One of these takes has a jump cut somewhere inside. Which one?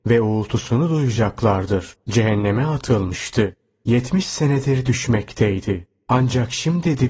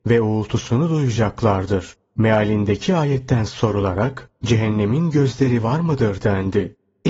first; 1 cut; at 2.0 s

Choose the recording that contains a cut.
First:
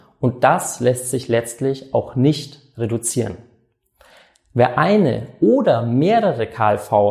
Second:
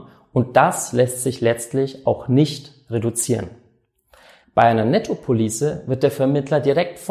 second; 1 cut; at 4.4 s

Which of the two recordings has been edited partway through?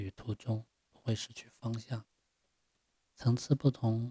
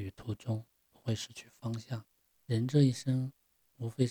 second; 1 cut; at 2.3 s

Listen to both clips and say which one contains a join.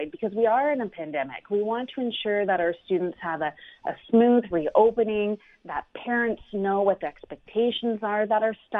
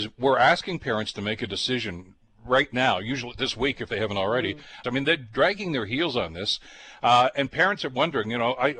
second; 1 cut; at 4.8 s

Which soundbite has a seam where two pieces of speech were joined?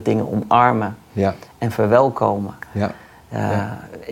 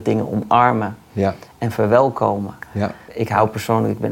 second; 1 cut; at 3.1 s

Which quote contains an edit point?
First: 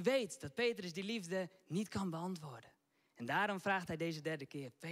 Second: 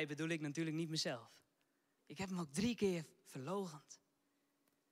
second; 1 cut; at 2.0 s

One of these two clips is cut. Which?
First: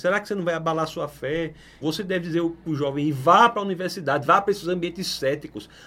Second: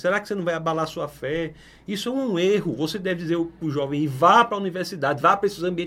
first; 1 cut; at 1.8 s

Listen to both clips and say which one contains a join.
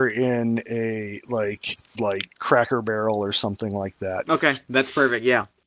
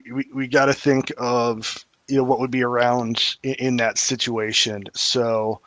first; 2 cuts; at 1.9 s, 4.3 s

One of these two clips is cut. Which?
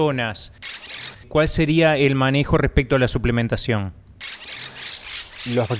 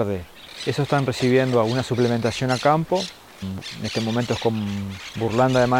second; 1 cut; at 3.4 s

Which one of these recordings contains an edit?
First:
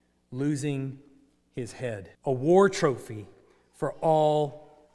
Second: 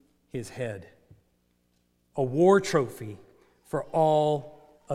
first; 1 cut; at 2.1 s

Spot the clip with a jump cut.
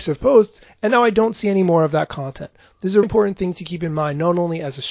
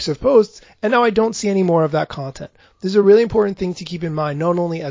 first; 1 cut; at 3.0 s

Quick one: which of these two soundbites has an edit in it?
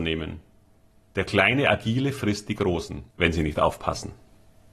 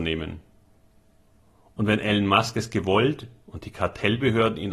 first; 2 cuts; at 1.0 s, 3.1 s

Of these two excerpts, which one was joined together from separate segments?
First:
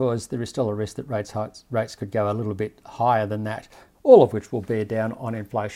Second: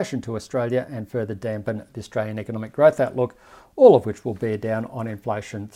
first; 1 cut; at 3.9 s

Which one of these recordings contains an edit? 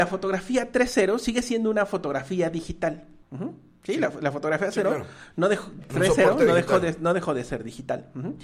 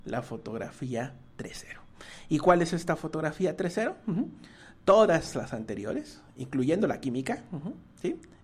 first; 1 cut; at 3.2 s

